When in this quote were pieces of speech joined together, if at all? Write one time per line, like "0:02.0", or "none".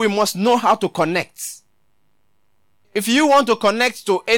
0:02.8